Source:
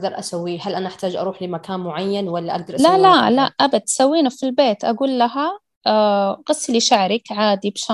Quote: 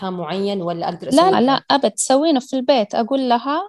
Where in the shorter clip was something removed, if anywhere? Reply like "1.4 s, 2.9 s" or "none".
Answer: 1.3 s